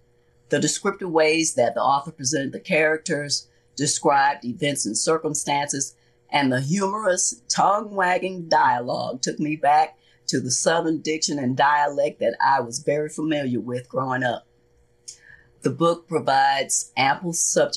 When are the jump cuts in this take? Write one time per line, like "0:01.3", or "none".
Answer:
none